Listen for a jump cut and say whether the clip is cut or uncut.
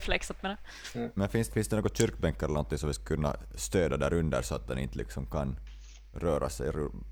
cut